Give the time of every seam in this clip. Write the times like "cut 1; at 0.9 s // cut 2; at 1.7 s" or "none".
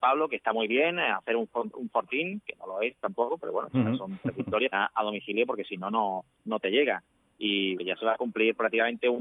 cut 1; at 4.7 s // cut 2; at 6.3 s // cut 3; at 7.7 s